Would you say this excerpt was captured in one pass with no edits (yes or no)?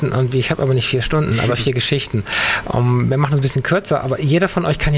yes